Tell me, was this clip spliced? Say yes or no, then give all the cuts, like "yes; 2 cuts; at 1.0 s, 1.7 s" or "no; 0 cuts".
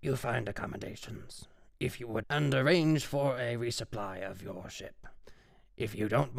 yes; 1 cut; at 2.2 s